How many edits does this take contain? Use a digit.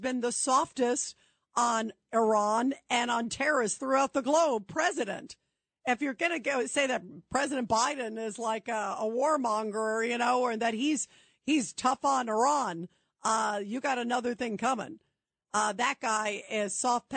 0